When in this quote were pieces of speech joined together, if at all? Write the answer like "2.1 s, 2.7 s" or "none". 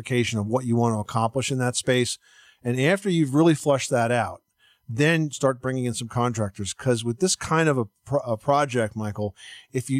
none